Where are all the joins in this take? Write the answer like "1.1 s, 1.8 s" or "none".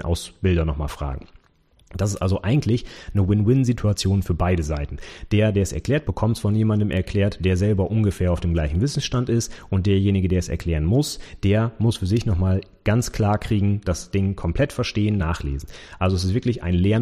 6.0 s, 13.8 s, 15.2 s